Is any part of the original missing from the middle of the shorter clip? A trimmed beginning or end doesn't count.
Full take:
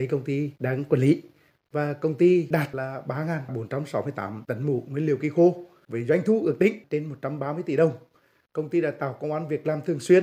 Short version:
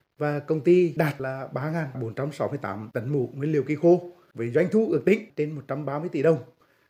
no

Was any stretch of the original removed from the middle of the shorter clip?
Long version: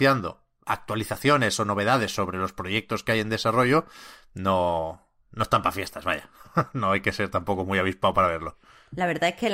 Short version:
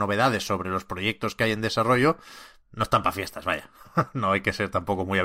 yes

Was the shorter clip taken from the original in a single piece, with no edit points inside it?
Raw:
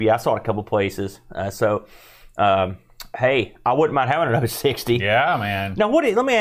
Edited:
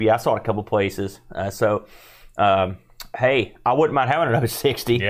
yes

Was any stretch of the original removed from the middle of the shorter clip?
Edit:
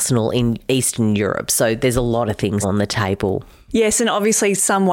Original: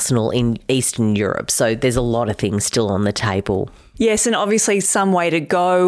yes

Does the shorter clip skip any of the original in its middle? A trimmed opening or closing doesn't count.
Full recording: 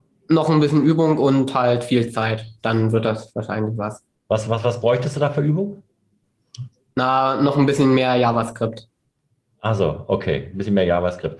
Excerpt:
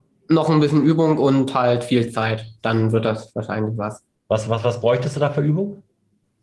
no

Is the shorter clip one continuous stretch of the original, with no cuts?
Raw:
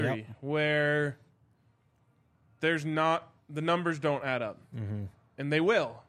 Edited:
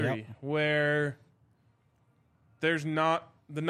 yes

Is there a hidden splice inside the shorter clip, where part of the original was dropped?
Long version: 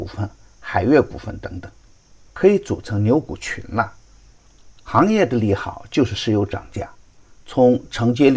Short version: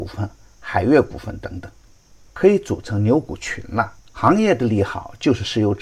yes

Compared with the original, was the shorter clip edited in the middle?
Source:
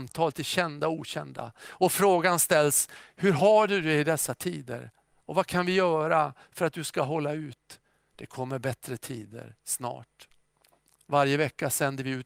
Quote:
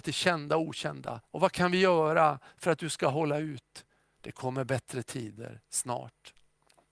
yes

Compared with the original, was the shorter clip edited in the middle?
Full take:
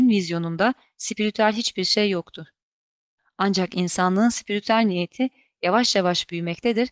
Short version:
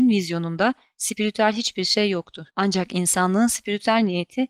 yes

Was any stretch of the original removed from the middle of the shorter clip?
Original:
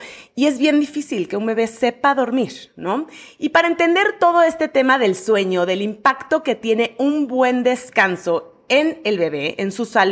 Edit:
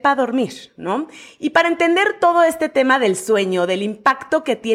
no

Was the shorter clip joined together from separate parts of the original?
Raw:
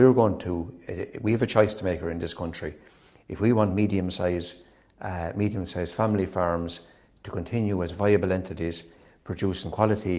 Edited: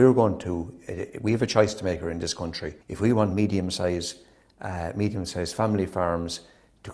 yes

